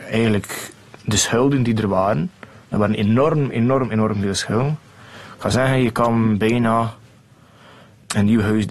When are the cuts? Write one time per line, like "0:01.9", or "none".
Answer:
none